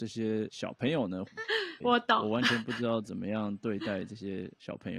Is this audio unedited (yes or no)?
no